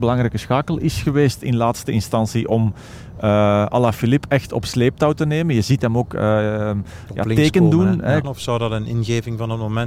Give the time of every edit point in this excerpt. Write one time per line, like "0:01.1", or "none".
0:08.2